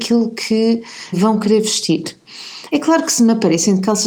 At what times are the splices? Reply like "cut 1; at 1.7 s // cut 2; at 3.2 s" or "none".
cut 1; at 1.1 s // cut 2; at 2.7 s